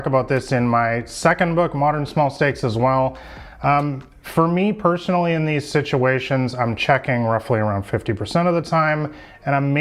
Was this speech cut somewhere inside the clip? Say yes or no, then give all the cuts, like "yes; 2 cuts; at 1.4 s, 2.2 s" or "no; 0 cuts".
no; 0 cuts